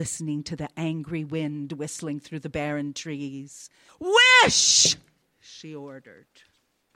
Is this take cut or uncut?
cut